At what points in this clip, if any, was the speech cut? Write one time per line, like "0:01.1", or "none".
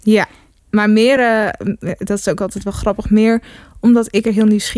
none